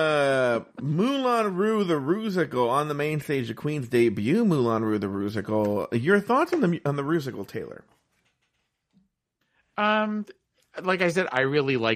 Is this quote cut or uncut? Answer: uncut